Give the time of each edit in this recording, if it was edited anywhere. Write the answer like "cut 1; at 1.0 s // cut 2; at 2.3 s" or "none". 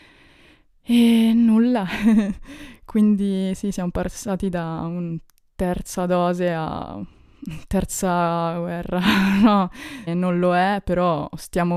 cut 1; at 10.1 s